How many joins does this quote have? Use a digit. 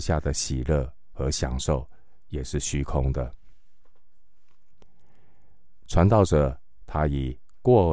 1